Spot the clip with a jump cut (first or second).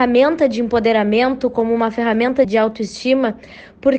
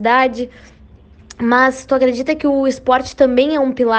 first